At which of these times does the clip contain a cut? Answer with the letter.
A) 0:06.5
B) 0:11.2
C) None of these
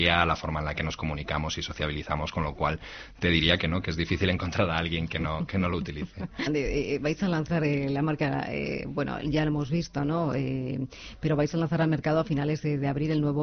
A